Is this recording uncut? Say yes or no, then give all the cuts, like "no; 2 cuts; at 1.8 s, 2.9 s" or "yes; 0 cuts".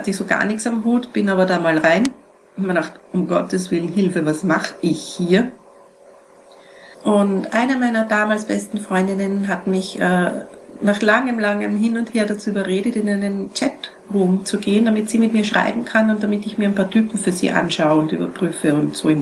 no; 1 cut; at 6.9 s